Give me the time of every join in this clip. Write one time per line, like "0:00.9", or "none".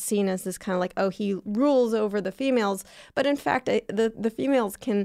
none